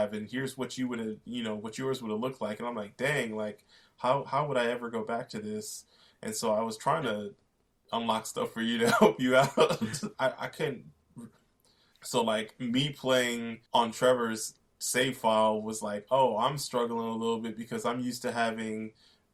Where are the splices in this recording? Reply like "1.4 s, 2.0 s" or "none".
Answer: 10.1 s, 11.9 s, 13.7 s